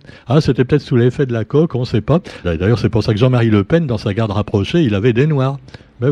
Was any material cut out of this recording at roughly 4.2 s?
no; 1 cut; at 2.4 s

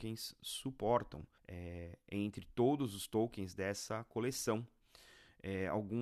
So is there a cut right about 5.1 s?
no; 1 cut; at 1.4 s

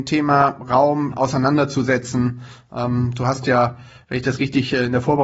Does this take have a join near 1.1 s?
yes; 1 cut; at 1.1 s

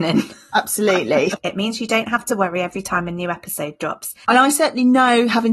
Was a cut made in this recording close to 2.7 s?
no; 2 cuts; at 1.4 s, 4.3 s

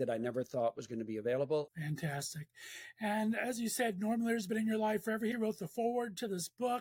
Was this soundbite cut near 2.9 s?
no; 2 cuts; at 1.7 s, 5.3 s

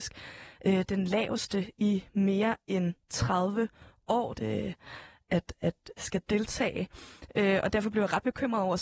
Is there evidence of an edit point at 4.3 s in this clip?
yes; 2 cuts; at 4.3 s, 6.0 s

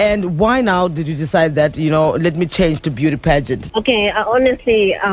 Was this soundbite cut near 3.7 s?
yes; 1 cut; at 3.7 s

